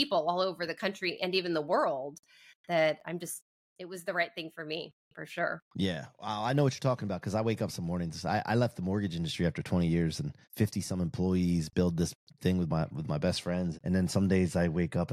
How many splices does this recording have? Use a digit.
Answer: 2